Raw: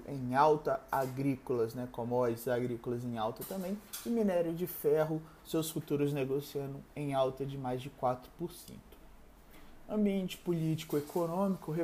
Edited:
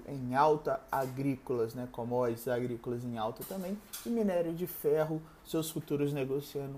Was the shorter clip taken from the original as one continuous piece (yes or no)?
yes